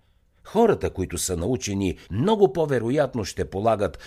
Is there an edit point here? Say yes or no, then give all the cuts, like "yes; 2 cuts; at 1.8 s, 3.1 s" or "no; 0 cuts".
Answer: yes; 1 cut; at 2.1 s